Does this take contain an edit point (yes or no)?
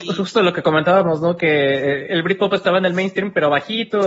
no